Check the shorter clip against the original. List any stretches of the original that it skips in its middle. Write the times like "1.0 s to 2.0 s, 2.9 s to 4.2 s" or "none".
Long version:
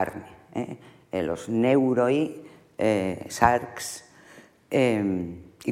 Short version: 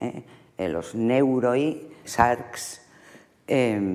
2.6 s to 3.3 s

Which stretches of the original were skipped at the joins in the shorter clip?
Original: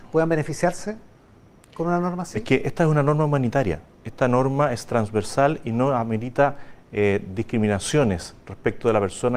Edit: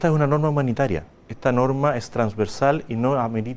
none

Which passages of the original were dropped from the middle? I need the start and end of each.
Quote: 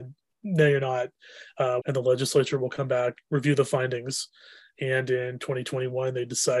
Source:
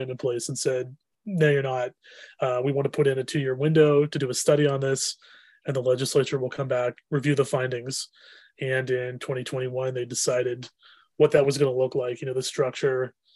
2.6 s to 5.6 s

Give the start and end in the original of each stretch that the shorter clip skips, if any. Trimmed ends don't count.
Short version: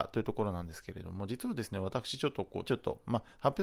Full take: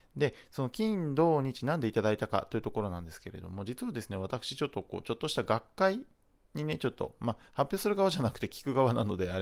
5.0 s to 6.8 s

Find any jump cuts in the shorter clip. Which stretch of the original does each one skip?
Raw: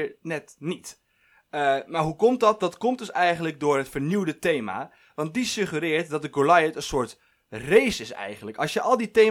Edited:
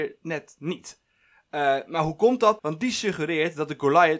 2.6 s to 5.1 s

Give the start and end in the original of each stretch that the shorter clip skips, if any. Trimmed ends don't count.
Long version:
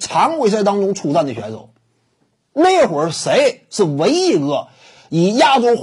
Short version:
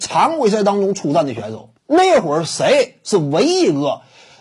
1.8 s to 2.4 s

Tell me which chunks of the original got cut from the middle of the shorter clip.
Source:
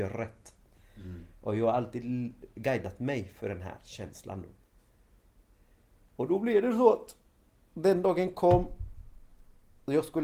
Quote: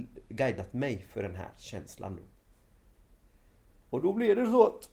none

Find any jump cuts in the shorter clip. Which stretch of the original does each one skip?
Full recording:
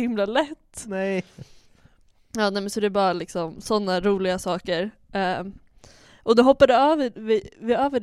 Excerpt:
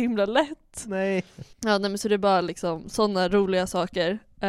1.5 s to 2.2 s

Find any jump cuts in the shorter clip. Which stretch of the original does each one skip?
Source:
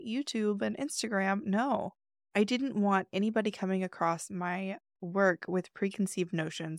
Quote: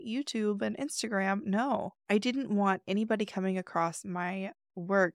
2.0 s to 2.3 s

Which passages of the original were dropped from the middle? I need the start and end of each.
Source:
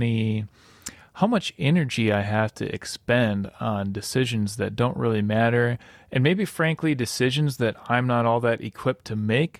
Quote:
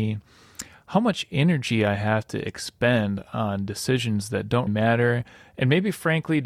4.9 s to 5.2 s

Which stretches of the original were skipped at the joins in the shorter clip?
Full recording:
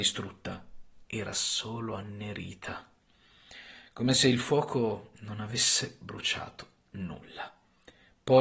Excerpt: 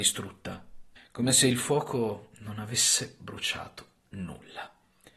1.0 s to 3.8 s

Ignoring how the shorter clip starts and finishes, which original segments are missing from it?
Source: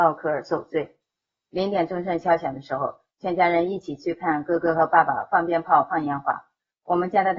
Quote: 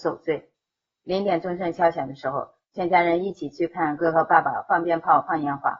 4.4 s to 4.6 s

